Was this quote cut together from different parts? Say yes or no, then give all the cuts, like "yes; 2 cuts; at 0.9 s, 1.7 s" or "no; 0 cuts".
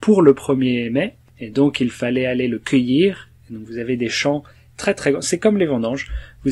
no; 0 cuts